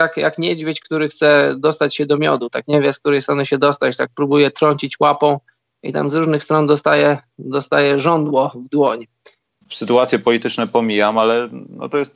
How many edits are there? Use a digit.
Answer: 1